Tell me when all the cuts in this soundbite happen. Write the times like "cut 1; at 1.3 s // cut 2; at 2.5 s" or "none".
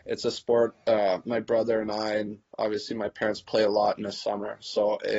none